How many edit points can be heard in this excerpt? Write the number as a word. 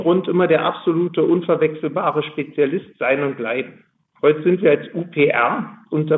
one